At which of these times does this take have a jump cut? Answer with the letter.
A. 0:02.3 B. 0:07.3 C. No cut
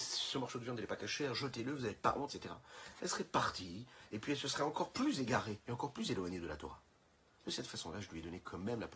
A